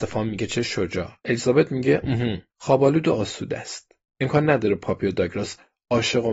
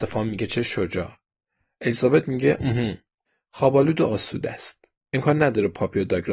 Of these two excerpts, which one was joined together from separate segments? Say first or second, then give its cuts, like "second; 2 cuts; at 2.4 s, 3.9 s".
first; 2 cuts; at 1.2 s, 2.5 s